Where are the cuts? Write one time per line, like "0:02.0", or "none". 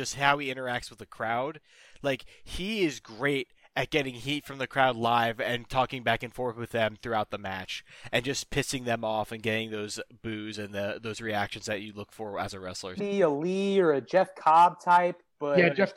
0:13.0